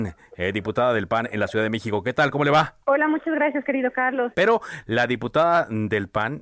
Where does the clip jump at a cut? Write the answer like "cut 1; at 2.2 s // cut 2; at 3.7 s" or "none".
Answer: cut 1; at 2.8 s // cut 2; at 4.3 s